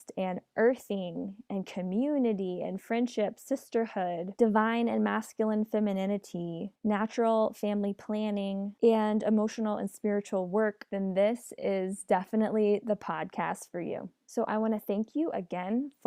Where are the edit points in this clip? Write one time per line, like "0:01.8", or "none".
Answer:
none